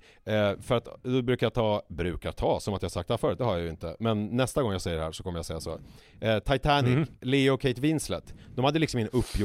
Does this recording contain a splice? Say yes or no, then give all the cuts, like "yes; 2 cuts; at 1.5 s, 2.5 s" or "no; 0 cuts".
no; 0 cuts